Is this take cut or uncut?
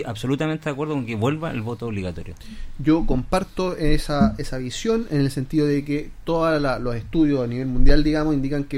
uncut